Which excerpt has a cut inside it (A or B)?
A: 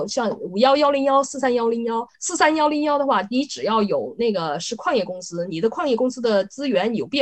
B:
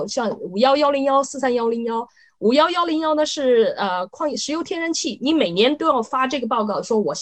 A